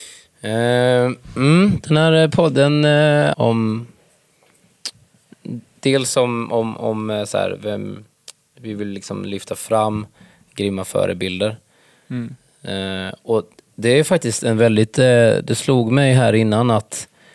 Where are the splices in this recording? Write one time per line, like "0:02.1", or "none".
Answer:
0:03.3